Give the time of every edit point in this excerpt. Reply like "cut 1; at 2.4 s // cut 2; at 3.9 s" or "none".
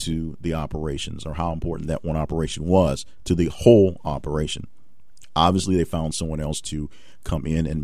none